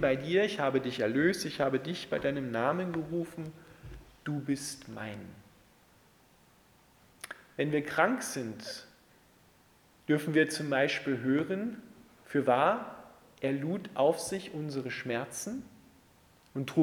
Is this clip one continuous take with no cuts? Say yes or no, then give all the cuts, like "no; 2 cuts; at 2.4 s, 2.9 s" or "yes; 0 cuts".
yes; 0 cuts